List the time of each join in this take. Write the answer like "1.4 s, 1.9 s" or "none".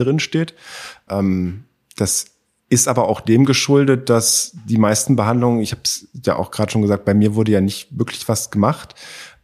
1.1 s